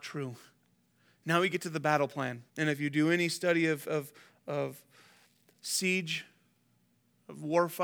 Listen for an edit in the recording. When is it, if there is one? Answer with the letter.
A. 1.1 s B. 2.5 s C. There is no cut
B